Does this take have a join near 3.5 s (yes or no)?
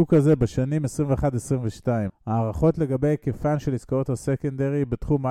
no